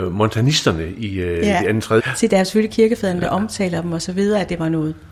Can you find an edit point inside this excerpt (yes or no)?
yes